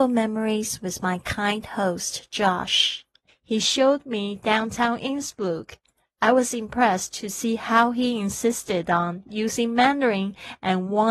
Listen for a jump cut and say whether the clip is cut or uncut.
cut